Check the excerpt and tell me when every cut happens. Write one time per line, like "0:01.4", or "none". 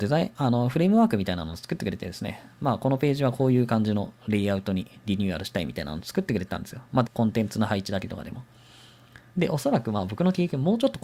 0:07.1
0:09.3

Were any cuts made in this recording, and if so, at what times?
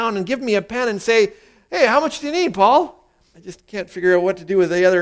0:03.3

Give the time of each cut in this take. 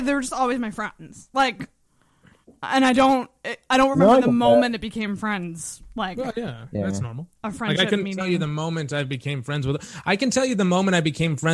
none

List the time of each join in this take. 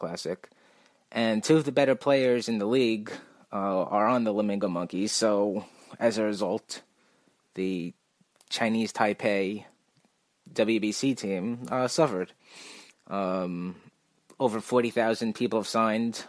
0:12.9

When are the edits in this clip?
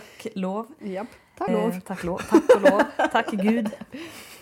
0:01.5

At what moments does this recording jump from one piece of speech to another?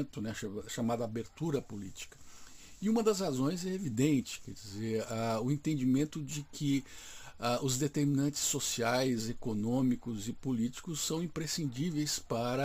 none

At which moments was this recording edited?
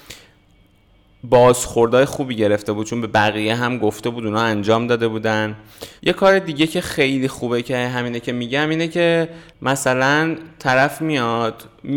0:06.0
0:09.5

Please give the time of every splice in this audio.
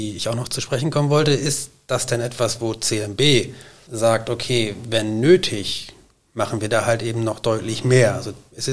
none

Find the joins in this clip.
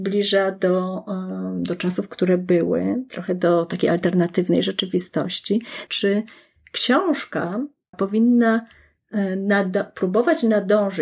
0:05.9
0:07.9

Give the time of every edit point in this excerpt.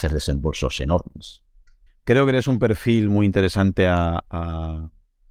0:01.9

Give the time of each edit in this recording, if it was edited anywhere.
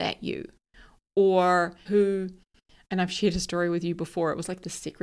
0:01.9

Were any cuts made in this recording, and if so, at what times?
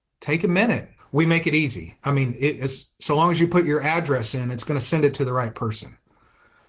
0:01.0

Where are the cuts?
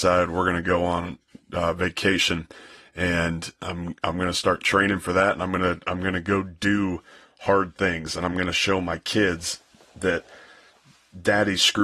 none

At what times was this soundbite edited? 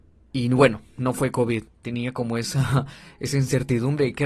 0:01.7

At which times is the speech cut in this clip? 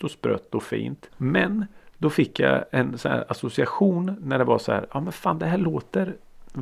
0:01.1

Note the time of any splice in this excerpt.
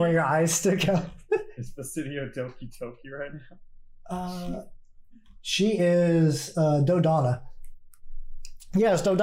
none

